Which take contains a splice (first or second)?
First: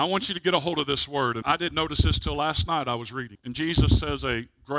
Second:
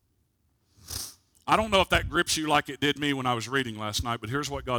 first